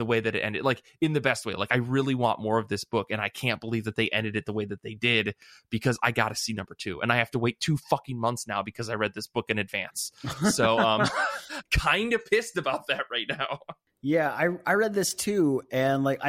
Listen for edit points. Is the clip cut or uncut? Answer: uncut